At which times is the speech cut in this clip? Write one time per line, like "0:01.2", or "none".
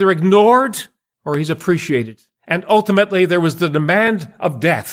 0:02.4